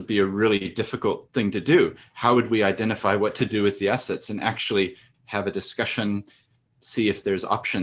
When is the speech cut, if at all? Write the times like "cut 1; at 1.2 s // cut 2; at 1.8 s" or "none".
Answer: cut 1; at 5.1 s

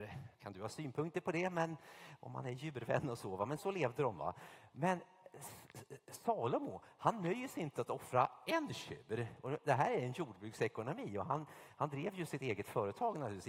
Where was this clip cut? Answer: cut 1; at 3.6 s

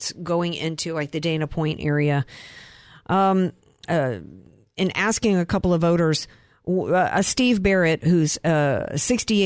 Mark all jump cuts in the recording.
cut 1; at 3.8 s

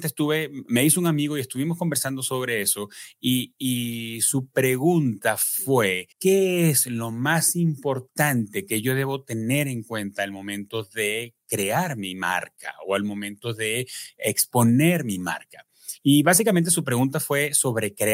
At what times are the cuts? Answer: cut 1; at 6.1 s

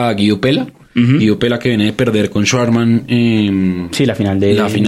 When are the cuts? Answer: none

